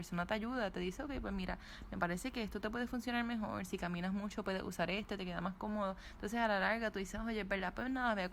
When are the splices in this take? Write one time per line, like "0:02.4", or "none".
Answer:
none